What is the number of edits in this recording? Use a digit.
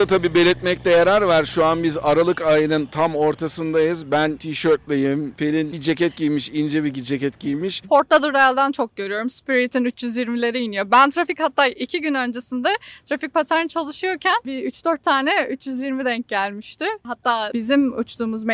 1